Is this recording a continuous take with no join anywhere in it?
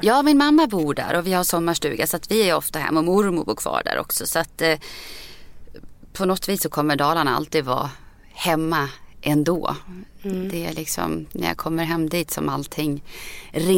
yes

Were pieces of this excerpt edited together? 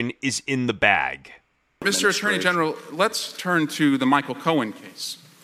no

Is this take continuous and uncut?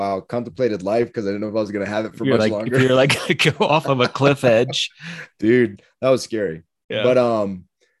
yes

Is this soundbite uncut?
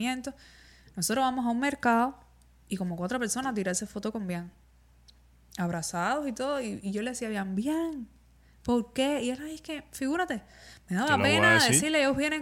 yes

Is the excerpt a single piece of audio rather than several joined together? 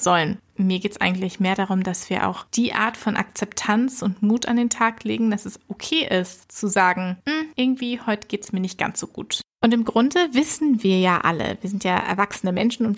yes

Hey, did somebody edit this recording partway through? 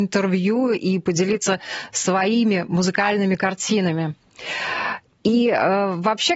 no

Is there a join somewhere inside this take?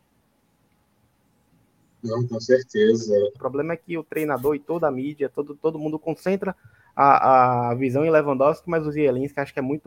yes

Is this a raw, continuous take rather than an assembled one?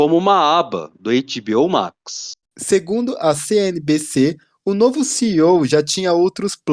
no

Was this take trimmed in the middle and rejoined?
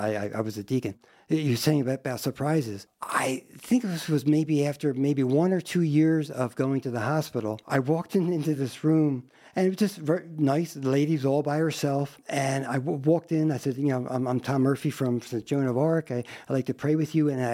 no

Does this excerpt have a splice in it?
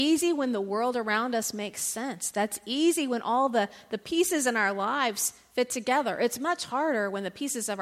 no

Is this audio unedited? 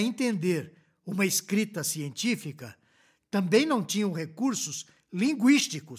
yes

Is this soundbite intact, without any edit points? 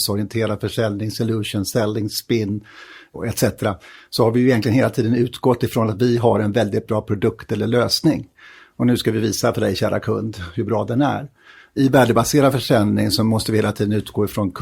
yes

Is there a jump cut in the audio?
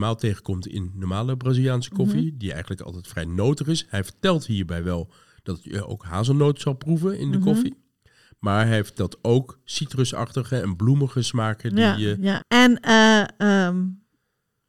yes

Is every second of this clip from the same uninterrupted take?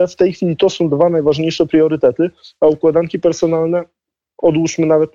yes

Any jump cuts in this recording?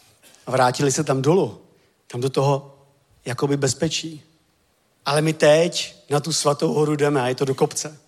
yes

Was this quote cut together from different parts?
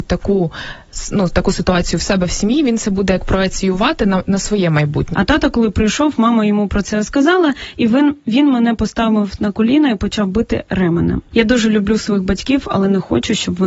yes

